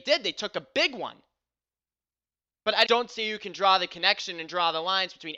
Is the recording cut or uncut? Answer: cut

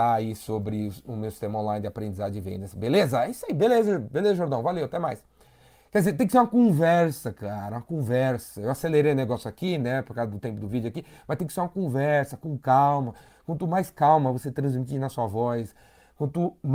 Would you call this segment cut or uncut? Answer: uncut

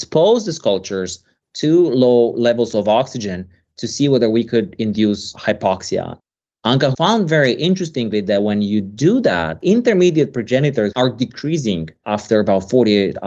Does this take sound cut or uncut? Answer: cut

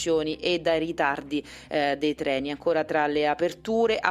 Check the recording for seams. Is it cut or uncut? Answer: uncut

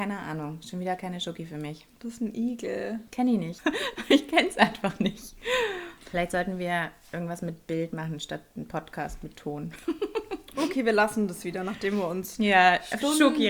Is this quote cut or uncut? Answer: cut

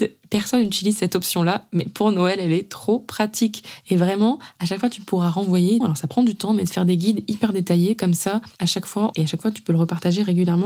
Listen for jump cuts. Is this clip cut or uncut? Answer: cut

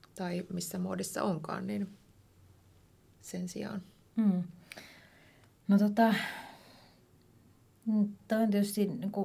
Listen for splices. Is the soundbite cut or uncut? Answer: uncut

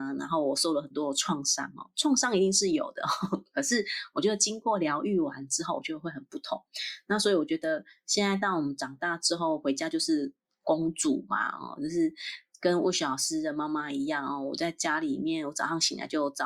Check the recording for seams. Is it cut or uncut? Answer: uncut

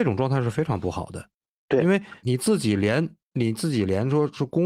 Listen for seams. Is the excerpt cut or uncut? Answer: cut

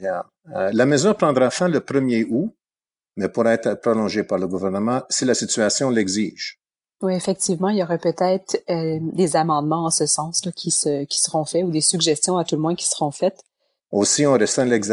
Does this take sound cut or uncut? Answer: cut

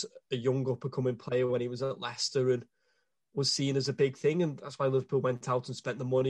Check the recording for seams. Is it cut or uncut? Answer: uncut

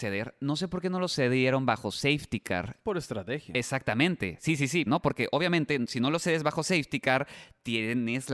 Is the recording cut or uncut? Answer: cut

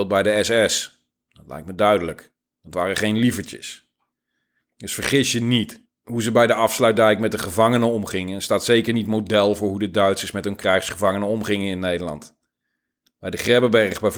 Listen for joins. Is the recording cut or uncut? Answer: uncut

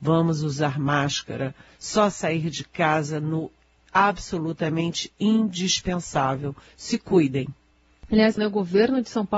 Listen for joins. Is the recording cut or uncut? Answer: cut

